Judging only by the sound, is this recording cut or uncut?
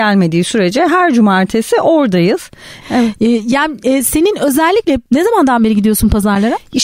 cut